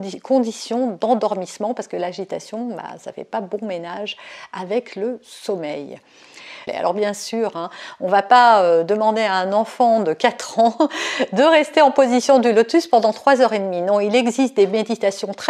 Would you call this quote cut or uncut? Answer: cut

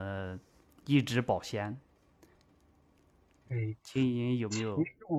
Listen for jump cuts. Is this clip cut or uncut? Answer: uncut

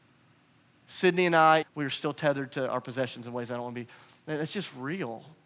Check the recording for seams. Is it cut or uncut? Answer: cut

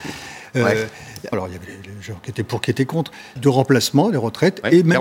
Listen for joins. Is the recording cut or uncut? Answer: cut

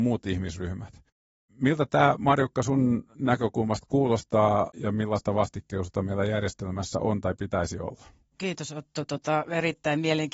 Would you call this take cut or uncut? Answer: uncut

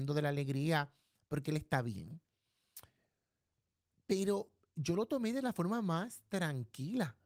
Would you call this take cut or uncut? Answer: uncut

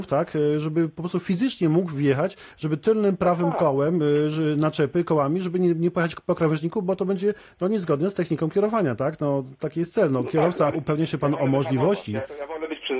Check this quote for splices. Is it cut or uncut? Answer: cut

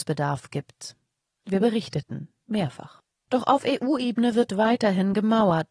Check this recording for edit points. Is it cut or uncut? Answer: uncut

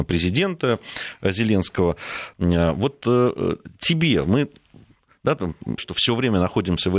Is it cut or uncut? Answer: cut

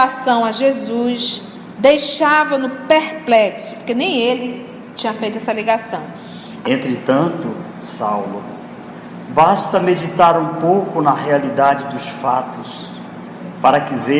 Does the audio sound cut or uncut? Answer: cut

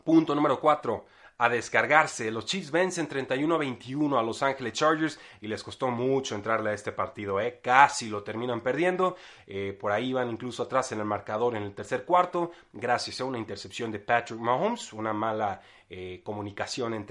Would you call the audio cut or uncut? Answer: uncut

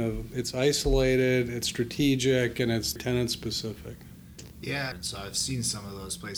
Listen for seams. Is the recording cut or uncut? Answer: cut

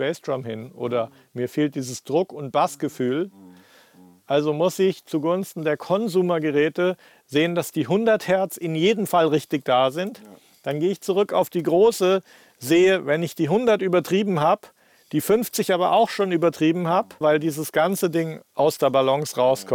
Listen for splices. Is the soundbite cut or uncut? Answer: cut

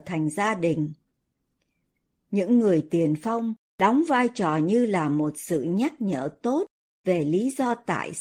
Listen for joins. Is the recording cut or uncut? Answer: uncut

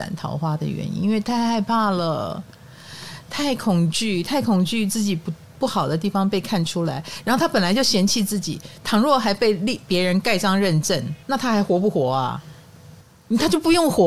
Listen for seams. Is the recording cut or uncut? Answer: cut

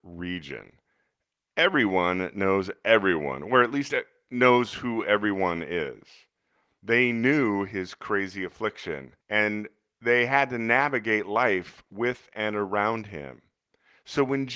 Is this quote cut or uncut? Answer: cut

